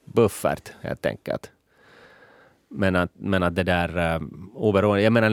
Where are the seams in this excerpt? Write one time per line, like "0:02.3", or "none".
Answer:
none